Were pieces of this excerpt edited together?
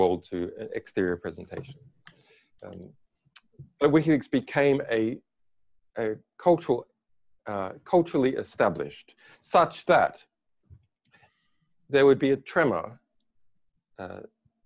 no; 0 cuts

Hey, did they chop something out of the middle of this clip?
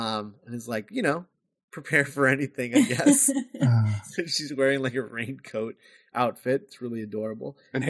no; 0 cuts

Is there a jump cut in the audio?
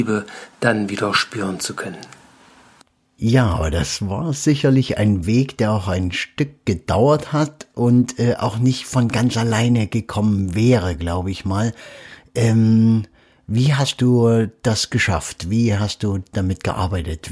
no; 0 cuts

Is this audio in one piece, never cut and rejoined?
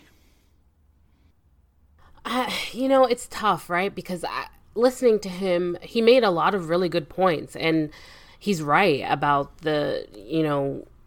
yes; 0 cuts

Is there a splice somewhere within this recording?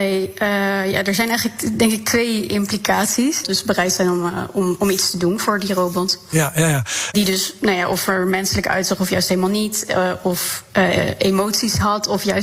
yes; 2 cuts; at 3.4 s, 7.1 s

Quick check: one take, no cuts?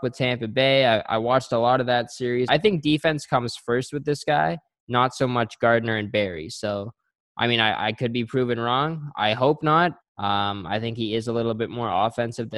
no; 2 cuts; at 2.5 s, 10.0 s

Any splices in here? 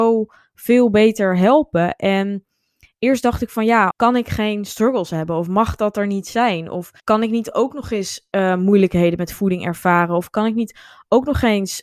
yes; 2 cuts; at 3.9 s, 7.0 s

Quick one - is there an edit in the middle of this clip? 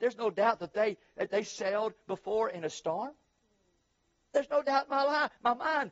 no; 0 cuts

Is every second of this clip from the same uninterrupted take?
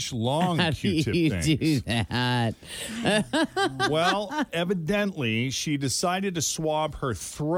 yes; 0 cuts

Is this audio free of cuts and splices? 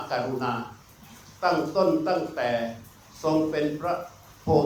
no; 1 cut; at 1.4 s

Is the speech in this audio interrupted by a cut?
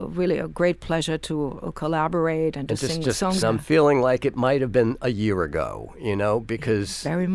yes; 1 cut; at 3.4 s

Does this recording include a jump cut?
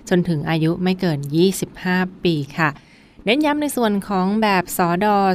no; 0 cuts

